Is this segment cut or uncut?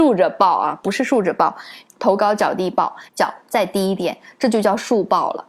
cut